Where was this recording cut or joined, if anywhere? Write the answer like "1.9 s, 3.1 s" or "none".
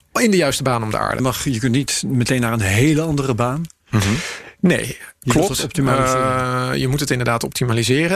1.2 s